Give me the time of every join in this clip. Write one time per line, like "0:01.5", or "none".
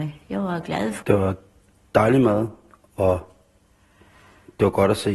0:01.0